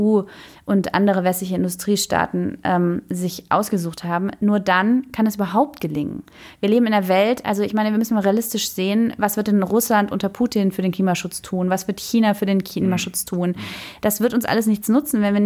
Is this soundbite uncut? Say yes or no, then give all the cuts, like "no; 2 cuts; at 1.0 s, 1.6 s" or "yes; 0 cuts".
yes; 0 cuts